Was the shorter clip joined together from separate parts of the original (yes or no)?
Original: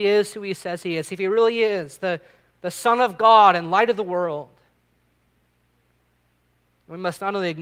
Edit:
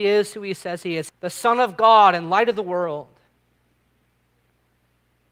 yes